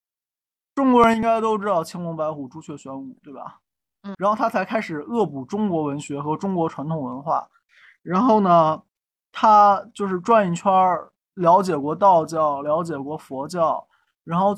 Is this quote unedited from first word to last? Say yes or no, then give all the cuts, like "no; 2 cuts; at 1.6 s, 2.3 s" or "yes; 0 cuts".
no; 1 cut; at 4.1 s